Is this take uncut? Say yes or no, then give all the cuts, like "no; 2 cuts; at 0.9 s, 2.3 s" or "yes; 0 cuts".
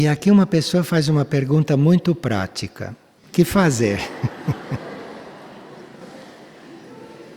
no; 1 cut; at 3.2 s